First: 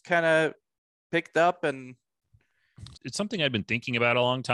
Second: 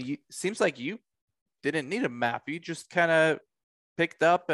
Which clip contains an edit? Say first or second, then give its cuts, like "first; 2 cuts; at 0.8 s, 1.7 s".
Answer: first; 1 cut; at 2.9 s